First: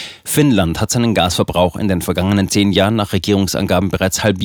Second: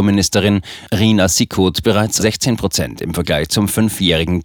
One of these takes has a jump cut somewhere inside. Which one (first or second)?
second